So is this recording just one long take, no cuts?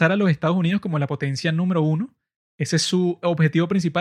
yes; 0 cuts

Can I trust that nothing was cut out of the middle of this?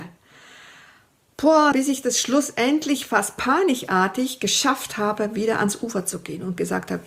no; 1 cut; at 1.7 s

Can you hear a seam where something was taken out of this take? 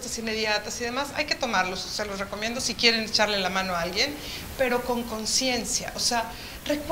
no; 0 cuts

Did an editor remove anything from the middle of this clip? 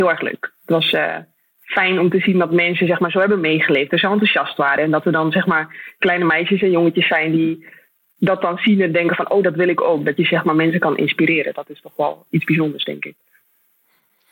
no; 0 cuts

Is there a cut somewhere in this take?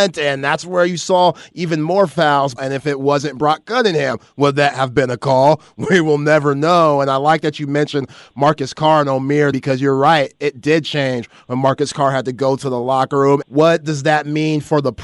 yes; 3 cuts; at 2.6 s, 9.5 s, 13.4 s

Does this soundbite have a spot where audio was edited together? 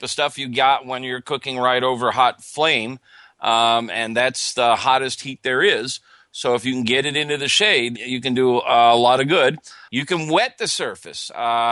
yes; 2 cuts; at 7.9 s, 9.9 s

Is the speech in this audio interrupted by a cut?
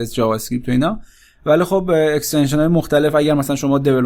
no; 0 cuts

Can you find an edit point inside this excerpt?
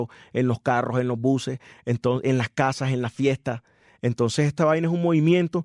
no; 0 cuts

